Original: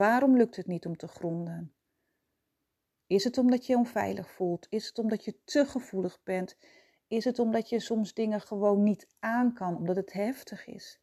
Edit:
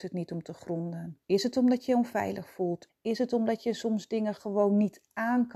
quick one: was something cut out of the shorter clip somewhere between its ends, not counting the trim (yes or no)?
yes